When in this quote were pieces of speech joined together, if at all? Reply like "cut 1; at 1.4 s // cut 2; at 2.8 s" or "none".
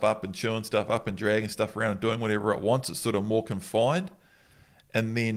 none